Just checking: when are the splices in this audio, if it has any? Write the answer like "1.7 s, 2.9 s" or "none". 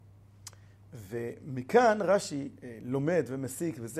none